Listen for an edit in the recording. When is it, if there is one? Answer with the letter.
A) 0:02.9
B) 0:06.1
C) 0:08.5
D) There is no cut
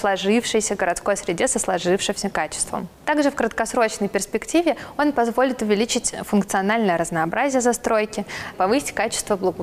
C